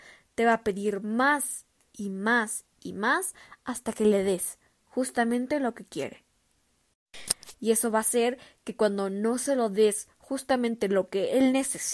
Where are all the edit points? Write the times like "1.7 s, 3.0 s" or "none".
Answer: 7.5 s